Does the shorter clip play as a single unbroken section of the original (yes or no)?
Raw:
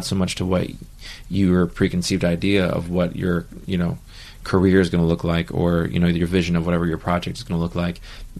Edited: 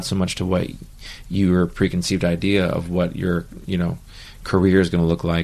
yes